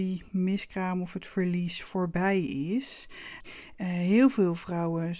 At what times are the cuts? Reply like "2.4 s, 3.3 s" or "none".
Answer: 3.4 s

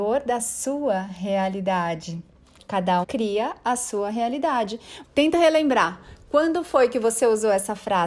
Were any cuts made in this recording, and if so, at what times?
3.0 s, 5.0 s

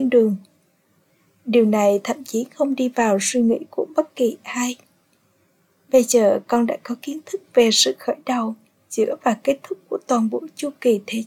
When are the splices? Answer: none

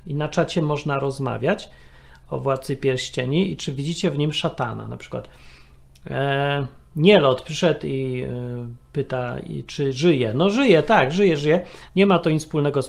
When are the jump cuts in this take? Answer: 11.9 s

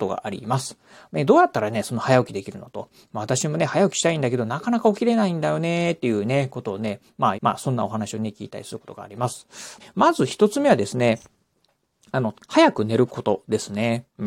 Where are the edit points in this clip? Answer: 7.3 s, 9.8 s, 12.3 s

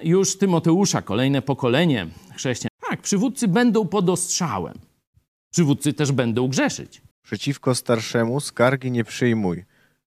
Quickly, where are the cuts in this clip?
2.7 s, 7.1 s

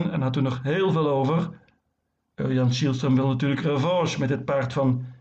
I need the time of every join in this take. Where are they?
none

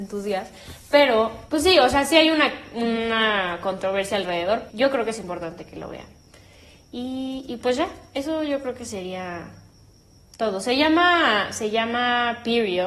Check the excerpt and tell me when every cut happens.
1.5 s, 4.7 s

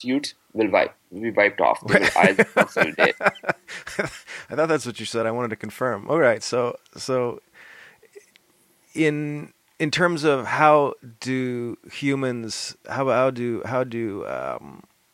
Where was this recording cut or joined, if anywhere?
none

